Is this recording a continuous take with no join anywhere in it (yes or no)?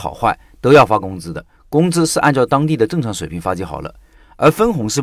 yes